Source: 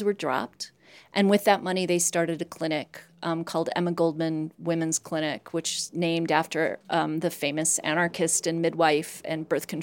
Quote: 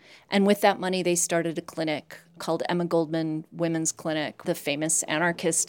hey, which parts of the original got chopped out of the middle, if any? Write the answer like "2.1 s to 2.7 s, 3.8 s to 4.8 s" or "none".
3.2 s to 3.4 s, 5.5 s to 7.2 s